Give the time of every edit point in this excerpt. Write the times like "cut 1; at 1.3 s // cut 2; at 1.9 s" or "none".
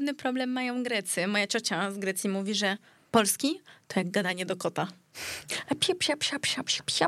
cut 1; at 6.0 s